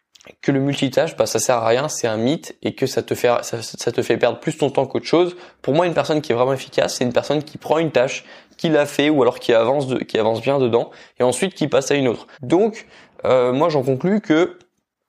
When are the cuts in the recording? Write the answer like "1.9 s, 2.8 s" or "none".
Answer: 12.3 s